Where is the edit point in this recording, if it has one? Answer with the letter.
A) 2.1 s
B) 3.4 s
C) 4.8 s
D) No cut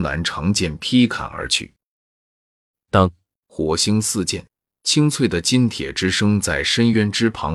B